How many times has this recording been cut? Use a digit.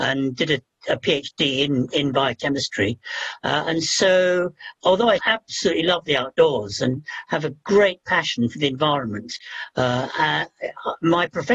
1